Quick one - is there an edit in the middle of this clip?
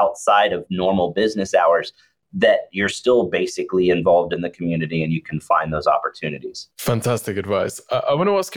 yes; 1 cut; at 6.7 s

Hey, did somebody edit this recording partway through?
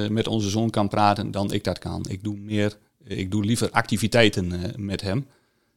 no; 0 cuts

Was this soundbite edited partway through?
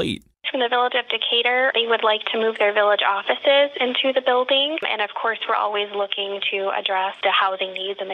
yes; 1 cut; at 4.8 s

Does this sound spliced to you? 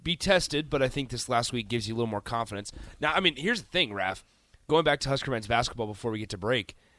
no; 0 cuts

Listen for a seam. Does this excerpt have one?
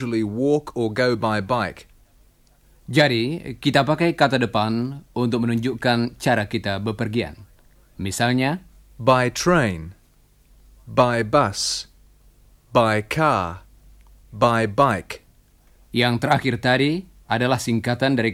no; 0 cuts

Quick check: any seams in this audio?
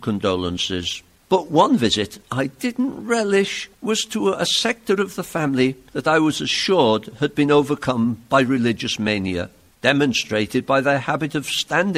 no; 0 cuts

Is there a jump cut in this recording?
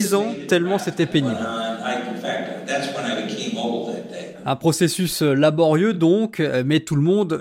no; 0 cuts

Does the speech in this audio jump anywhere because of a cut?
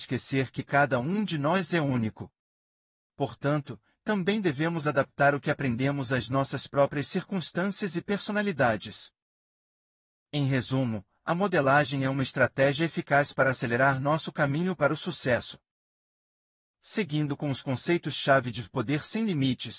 yes; 1 cut; at 4.0 s

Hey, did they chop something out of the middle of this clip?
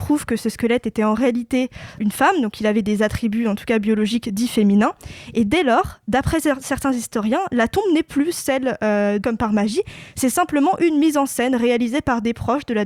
yes; 2 cuts; at 2.0 s, 9.2 s

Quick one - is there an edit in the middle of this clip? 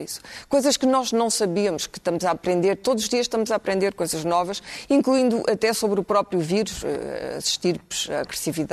no; 0 cuts

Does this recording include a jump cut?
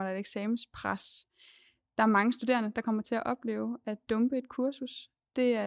no; 0 cuts

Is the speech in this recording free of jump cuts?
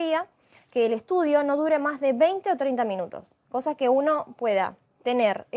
yes; 0 cuts

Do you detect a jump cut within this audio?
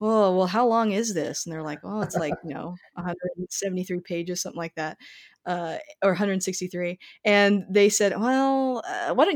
no; 0 cuts

